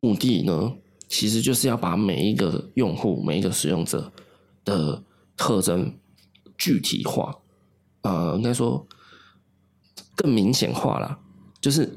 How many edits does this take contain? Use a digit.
1